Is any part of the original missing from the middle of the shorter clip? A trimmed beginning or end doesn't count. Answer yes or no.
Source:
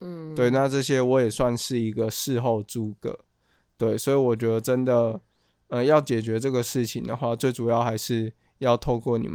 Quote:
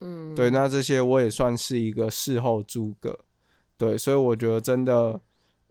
no